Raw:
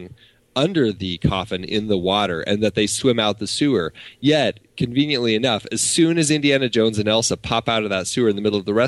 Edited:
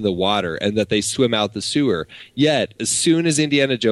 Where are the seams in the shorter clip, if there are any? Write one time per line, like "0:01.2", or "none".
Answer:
0:02.8